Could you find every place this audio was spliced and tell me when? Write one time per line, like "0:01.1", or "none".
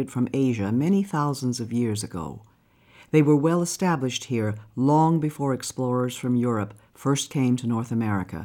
none